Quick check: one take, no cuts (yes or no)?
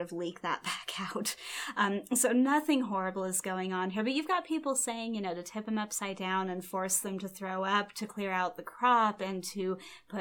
yes